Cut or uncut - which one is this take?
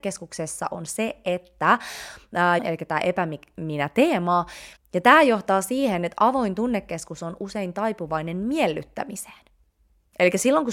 cut